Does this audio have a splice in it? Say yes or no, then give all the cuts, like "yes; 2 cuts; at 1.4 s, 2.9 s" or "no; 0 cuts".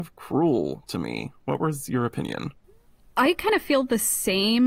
no; 0 cuts